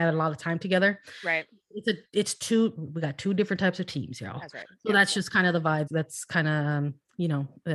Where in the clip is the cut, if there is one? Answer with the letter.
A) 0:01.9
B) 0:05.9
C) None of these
B